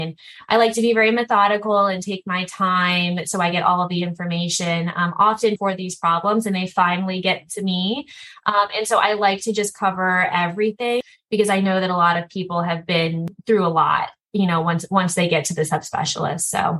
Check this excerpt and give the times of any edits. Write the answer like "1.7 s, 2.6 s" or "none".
5.6 s